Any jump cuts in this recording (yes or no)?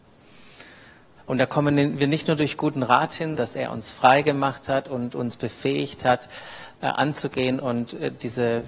yes